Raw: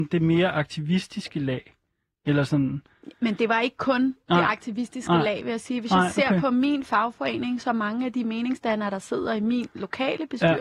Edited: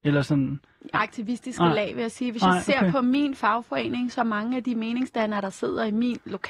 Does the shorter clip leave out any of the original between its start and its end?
yes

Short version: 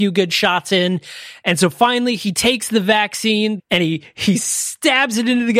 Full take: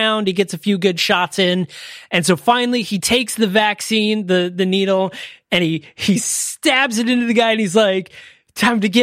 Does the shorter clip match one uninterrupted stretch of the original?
no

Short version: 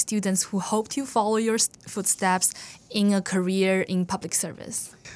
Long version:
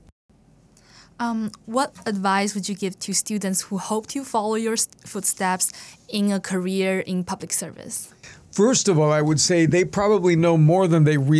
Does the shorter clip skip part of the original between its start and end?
no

